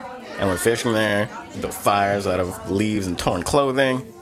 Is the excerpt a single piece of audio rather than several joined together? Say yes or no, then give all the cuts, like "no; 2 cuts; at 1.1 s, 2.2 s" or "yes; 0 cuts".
no; 1 cut; at 1.5 s